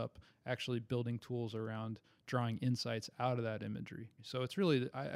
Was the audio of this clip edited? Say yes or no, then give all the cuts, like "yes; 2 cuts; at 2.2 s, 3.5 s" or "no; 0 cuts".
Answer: yes; 1 cut; at 4.2 s